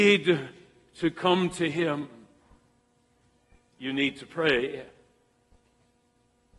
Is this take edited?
no; 0 cuts

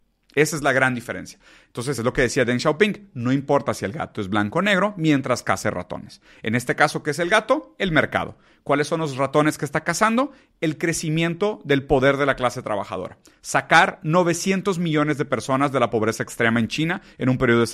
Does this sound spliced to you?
no; 0 cuts

